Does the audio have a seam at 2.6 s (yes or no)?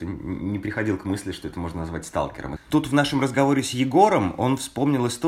yes